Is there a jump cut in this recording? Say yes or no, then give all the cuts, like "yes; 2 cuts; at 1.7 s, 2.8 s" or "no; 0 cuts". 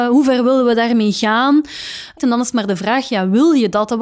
yes; 1 cut; at 2.2 s